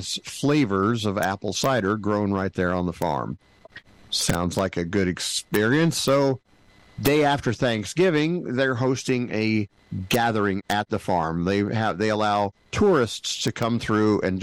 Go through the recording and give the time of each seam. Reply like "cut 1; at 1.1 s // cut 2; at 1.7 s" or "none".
none